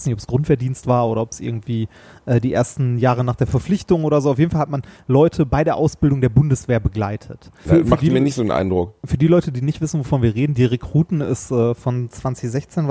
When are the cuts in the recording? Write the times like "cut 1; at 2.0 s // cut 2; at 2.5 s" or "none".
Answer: cut 1; at 7.7 s